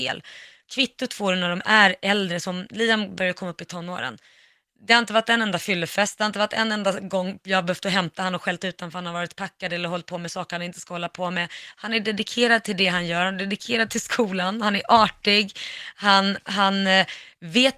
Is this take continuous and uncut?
yes; 0 cuts

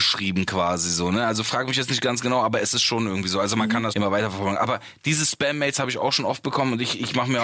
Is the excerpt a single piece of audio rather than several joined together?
no; 1 cut; at 3.9 s

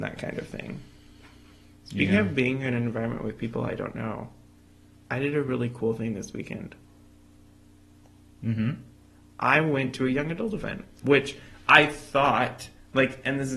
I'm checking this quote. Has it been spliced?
yes; 1 cut; at 11.0 s

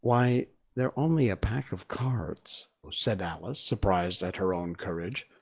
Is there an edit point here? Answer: yes; 1 cut; at 2.8 s

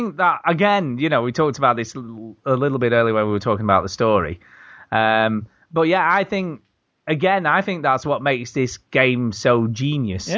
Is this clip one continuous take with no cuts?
yes; 0 cuts

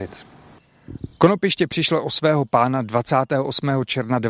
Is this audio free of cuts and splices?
yes; 0 cuts

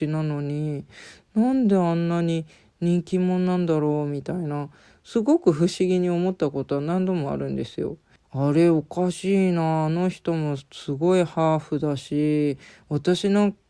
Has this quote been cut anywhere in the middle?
yes; 1 cut; at 8.2 s

